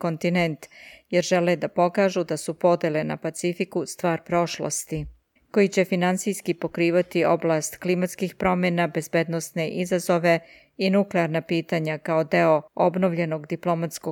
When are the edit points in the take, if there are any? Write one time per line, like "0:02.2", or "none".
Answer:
0:05.4
0:12.7